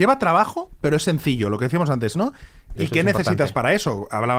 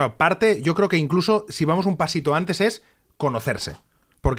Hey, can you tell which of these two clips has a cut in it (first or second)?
first